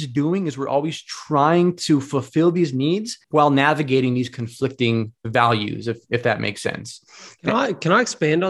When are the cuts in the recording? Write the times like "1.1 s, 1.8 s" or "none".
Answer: 3.2 s